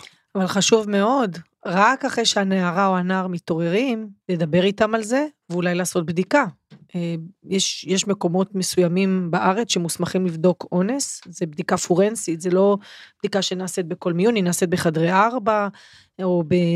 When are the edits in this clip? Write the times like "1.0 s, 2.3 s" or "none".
4.2 s